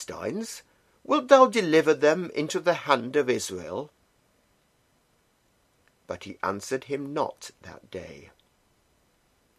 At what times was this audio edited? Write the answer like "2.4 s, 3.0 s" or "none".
none